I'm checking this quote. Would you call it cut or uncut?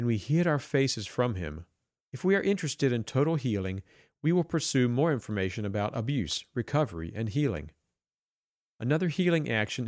cut